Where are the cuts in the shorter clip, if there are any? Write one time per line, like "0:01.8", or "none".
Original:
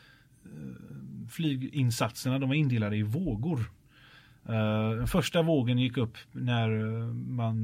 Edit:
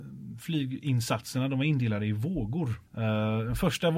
0:02.9

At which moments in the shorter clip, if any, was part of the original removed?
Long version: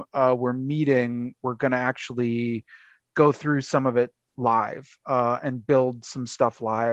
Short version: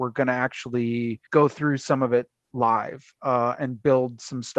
0:01.3

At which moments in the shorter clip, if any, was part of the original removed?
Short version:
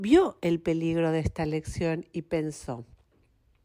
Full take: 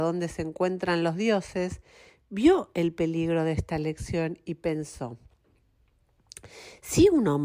none

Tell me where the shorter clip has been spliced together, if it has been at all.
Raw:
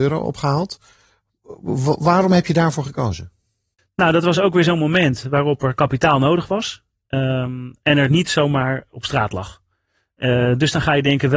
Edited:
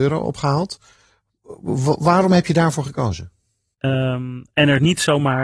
0:03.8

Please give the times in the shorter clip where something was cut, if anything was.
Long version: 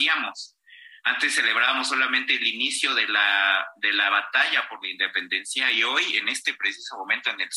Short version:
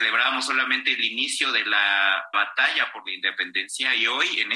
0:02.3

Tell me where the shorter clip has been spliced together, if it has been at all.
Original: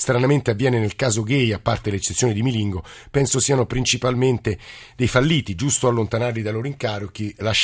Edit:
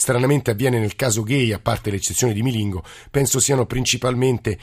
none

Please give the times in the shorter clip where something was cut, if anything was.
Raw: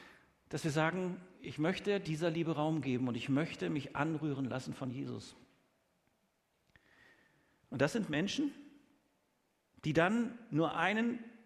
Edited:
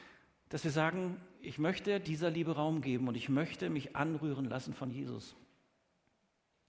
none

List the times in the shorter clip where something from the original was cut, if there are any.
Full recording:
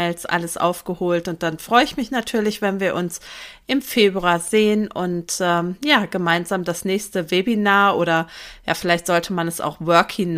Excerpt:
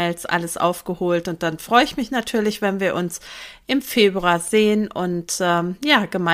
none

